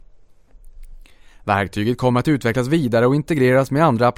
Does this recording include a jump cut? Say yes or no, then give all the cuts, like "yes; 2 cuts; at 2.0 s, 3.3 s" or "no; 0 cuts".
no; 0 cuts